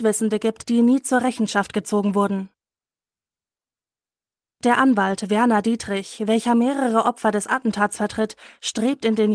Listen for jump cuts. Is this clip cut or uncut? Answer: uncut